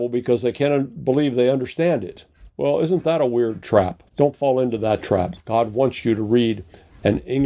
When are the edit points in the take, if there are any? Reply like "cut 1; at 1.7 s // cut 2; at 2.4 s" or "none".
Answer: cut 1; at 4.1 s // cut 2; at 5.4 s

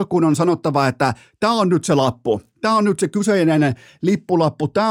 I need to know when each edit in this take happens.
none

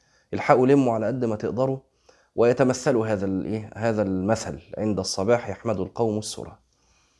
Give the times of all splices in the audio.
none

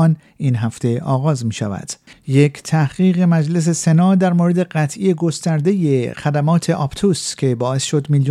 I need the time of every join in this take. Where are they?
cut 1; at 2.1 s

